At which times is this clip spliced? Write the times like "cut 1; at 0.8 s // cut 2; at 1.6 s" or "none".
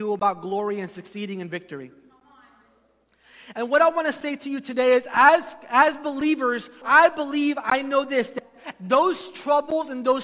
cut 1; at 6.8 s